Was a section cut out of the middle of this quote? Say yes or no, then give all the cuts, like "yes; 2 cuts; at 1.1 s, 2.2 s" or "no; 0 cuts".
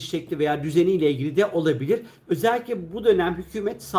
no; 0 cuts